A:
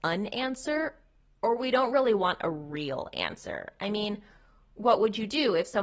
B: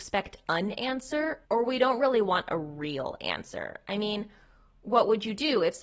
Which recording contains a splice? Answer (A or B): B